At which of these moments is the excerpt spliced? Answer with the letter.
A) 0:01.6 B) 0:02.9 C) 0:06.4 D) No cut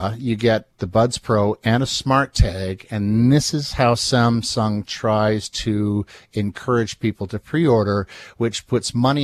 D